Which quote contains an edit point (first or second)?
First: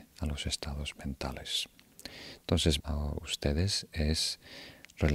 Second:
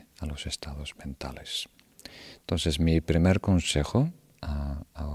first